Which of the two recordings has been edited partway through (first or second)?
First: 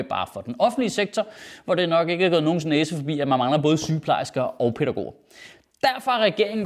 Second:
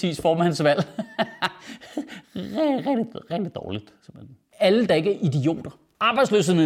second